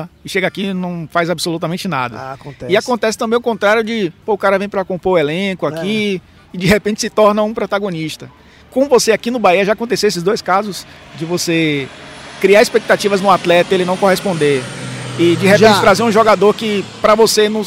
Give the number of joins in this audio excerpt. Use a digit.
0